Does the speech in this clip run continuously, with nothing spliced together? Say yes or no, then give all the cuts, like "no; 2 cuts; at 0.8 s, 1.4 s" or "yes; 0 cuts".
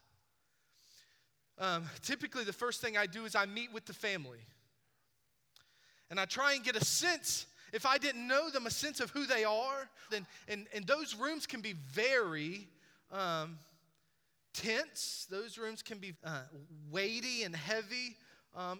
no; 2 cuts; at 10.1 s, 16.1 s